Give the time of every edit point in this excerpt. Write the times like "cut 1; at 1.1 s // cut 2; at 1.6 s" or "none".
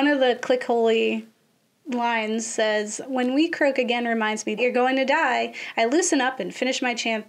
cut 1; at 3.0 s // cut 2; at 4.6 s